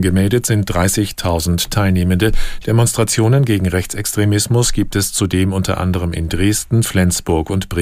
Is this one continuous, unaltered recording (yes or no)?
no